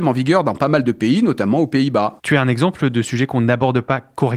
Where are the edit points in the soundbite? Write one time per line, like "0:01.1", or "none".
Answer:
0:02.2